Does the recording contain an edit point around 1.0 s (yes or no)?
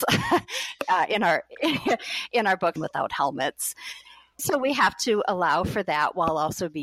no